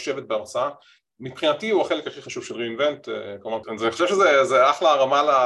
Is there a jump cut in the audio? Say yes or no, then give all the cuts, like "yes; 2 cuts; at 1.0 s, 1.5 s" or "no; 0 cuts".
yes; 1 cut; at 3.6 s